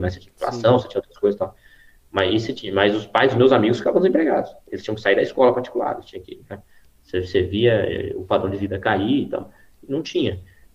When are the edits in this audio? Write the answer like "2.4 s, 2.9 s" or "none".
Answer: none